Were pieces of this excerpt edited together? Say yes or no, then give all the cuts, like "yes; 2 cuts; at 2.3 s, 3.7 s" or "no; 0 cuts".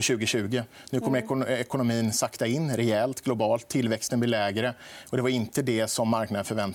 no; 0 cuts